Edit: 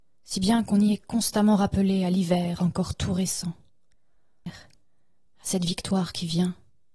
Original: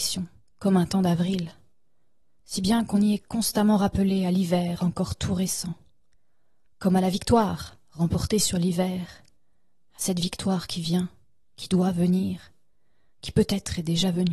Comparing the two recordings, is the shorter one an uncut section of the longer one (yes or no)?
no